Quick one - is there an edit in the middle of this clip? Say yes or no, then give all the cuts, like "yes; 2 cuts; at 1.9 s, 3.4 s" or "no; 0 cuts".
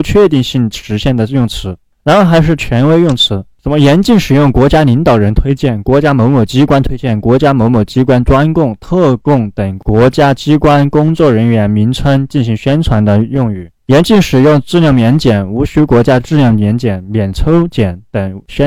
no; 0 cuts